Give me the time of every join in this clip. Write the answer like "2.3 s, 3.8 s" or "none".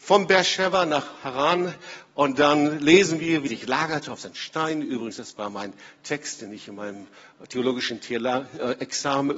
3.5 s